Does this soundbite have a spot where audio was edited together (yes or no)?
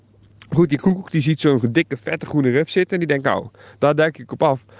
no